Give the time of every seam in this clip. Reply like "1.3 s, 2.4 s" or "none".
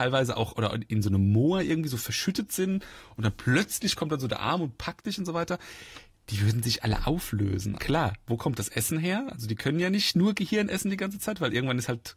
7.8 s